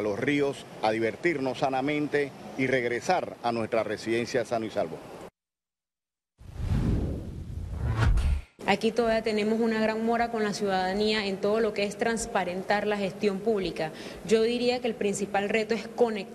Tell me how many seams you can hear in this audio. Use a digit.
1